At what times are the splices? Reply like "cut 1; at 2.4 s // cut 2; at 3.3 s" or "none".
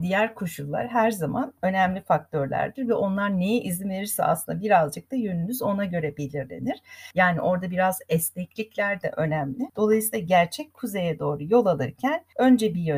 none